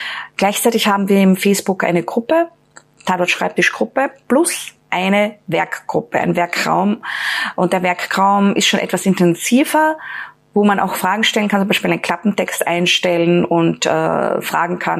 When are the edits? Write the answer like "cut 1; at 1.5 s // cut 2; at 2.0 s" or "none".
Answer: none

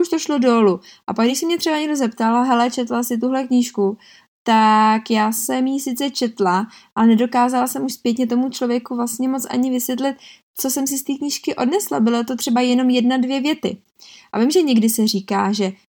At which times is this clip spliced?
none

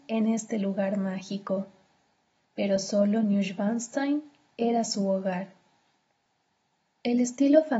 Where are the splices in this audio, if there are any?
cut 1; at 2.5 s

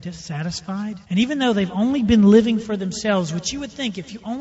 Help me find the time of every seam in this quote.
cut 1; at 1.0 s

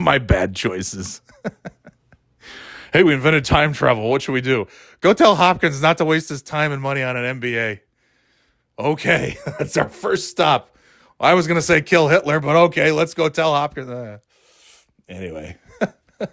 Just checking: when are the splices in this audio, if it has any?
none

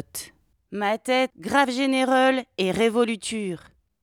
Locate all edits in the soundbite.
cut 1; at 1.3 s

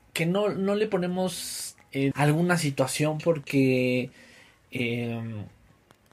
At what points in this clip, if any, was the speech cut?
cut 1; at 2.1 s

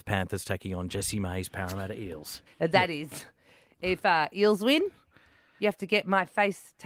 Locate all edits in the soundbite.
cut 1; at 2.5 s

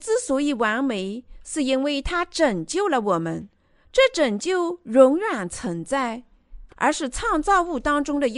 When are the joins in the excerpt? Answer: cut 1; at 6.7 s

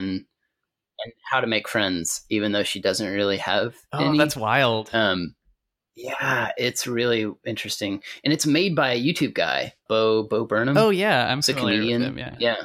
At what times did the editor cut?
cut 1; at 9.9 s

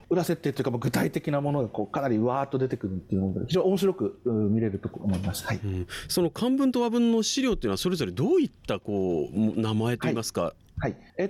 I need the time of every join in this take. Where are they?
none

